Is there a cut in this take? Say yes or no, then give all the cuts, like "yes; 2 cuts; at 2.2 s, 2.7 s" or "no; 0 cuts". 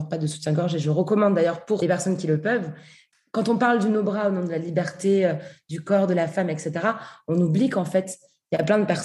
no; 0 cuts